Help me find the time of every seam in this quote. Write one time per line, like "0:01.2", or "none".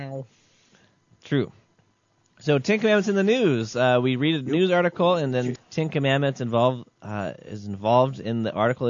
0:05.6